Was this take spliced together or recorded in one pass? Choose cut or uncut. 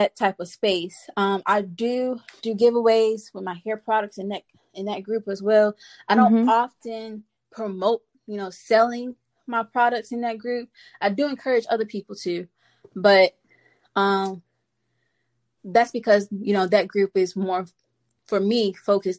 uncut